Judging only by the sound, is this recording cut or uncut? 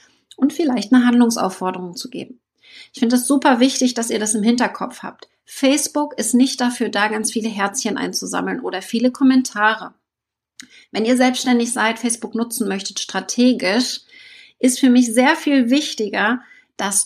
uncut